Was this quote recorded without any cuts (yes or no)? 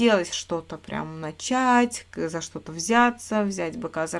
yes